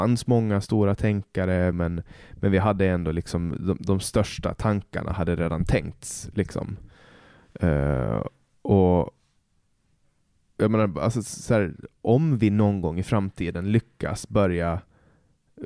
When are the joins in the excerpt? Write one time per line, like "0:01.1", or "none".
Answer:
0:01.7